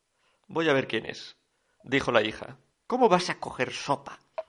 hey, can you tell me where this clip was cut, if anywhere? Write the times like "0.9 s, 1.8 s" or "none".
2.7 s

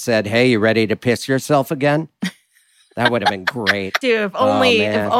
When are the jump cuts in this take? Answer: 4.0 s

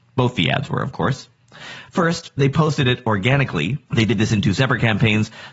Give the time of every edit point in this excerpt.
3.9 s

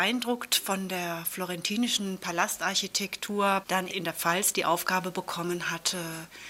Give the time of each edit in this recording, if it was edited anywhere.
3.6 s

